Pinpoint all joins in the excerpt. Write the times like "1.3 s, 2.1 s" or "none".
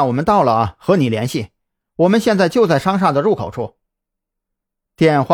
none